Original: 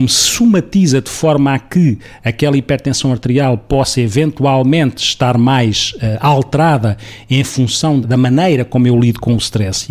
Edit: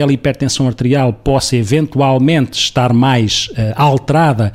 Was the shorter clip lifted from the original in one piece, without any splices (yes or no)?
yes